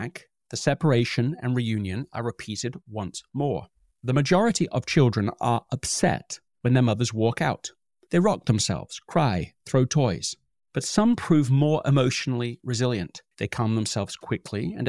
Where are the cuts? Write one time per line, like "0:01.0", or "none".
0:13.3

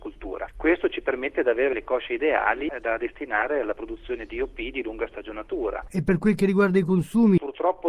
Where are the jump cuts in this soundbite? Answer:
none

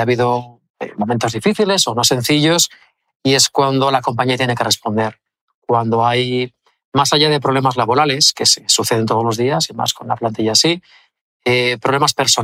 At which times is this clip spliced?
none

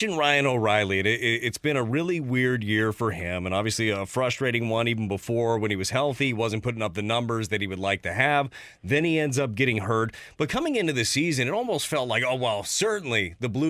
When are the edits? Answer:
none

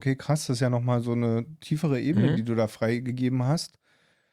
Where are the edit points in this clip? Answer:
none

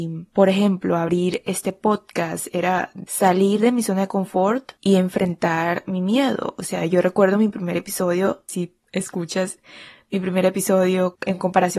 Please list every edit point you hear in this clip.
none

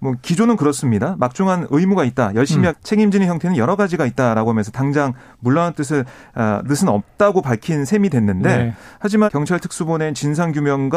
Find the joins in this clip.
0:02.7
0:09.3

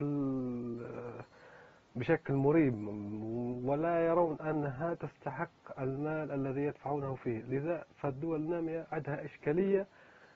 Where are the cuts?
none

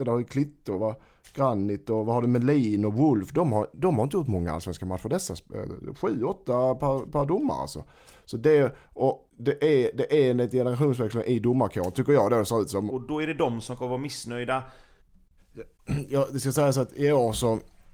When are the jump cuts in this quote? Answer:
0:09.3
0:12.9
0:15.4

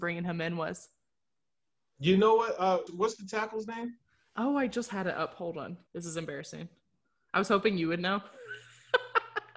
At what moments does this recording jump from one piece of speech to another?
0:02.9
0:05.9

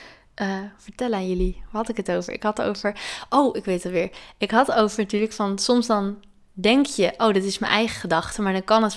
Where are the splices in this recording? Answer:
none

